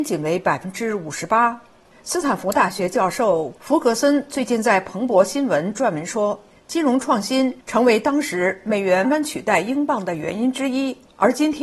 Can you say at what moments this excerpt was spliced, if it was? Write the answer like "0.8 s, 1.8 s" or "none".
2.0 s, 9.0 s

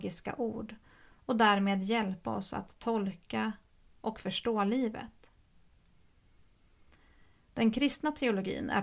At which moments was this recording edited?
none

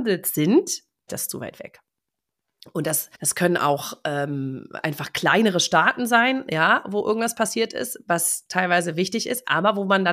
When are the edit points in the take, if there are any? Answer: 1.1 s, 3.1 s

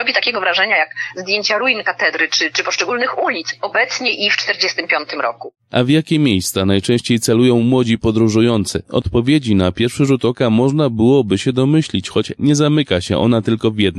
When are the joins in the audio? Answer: none

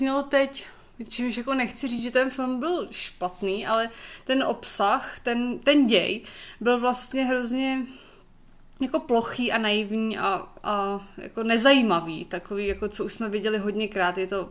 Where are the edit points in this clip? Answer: none

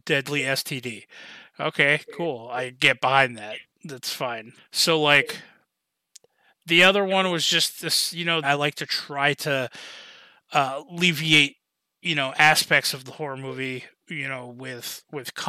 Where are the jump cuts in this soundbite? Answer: 4.6 s, 8.4 s, 14.0 s

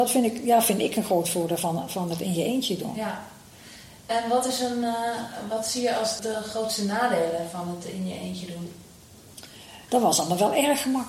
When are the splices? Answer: 6.2 s, 9.9 s

